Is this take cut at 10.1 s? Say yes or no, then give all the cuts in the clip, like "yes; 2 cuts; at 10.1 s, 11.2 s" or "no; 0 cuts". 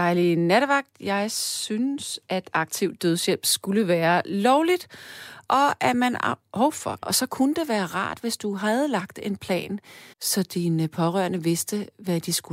yes; 2 cuts; at 7.0 s, 10.1 s